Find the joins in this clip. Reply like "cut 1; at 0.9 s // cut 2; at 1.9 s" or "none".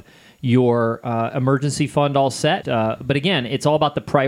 cut 1; at 2.6 s